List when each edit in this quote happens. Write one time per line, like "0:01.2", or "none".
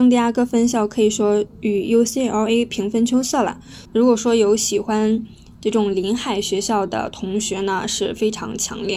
0:03.8